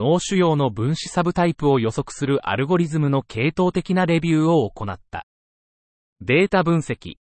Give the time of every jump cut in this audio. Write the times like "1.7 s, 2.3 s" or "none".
none